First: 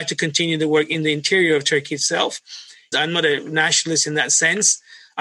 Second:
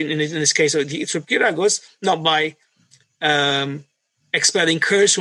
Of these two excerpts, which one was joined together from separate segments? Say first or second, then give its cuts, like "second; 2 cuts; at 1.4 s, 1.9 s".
first; 1 cut; at 2.9 s